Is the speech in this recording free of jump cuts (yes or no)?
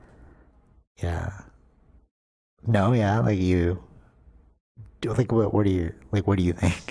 yes